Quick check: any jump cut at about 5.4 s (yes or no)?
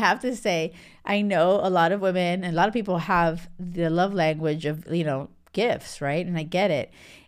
no